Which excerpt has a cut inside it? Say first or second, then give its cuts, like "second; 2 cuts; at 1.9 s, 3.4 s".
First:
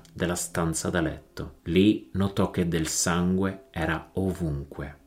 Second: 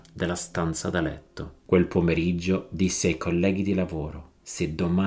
second; 1 cut; at 1.6 s